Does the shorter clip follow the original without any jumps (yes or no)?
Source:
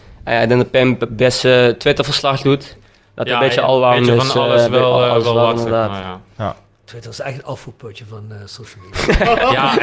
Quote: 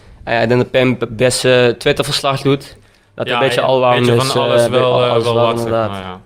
yes